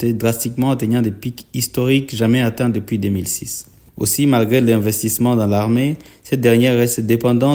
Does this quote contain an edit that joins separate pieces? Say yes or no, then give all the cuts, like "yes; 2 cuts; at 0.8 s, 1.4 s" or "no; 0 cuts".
no; 0 cuts